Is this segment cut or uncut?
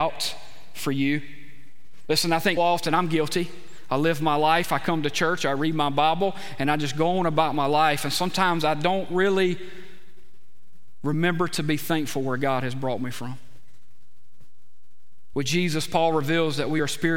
cut